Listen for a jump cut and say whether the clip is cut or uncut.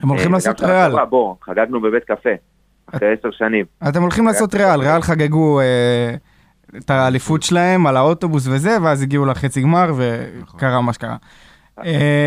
uncut